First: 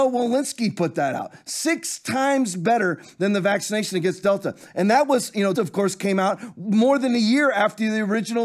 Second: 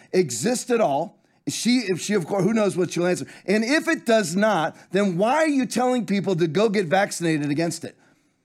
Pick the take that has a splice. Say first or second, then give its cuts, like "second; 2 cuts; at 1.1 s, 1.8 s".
first; 1 cut; at 5.5 s